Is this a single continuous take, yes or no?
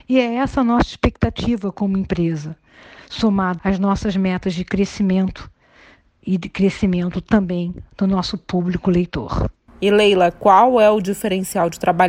no